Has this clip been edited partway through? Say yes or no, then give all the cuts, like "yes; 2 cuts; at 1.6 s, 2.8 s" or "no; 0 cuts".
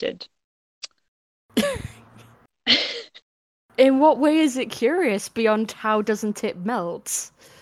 no; 0 cuts